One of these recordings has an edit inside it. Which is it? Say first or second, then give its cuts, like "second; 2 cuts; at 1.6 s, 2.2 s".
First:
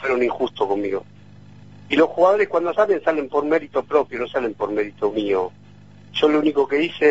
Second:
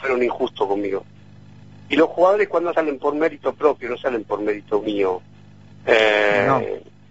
second; 2 cuts; at 2.7 s, 5.7 s